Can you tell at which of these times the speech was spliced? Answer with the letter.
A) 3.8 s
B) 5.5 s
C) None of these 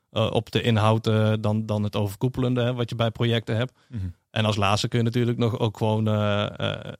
C